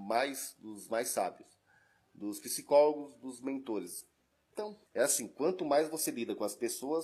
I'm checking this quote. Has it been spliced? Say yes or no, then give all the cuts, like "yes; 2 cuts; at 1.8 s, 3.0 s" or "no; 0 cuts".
yes; 1 cut; at 4.9 s